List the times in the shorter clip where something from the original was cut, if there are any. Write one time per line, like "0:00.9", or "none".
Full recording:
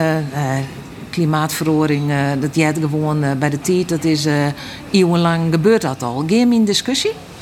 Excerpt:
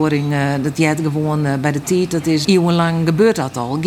0:02.4